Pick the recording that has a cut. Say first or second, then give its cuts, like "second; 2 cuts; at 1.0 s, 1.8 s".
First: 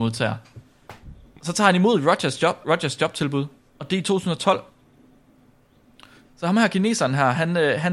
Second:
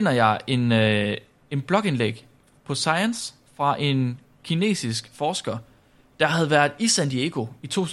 first; 2 cuts; at 2.6 s, 6.2 s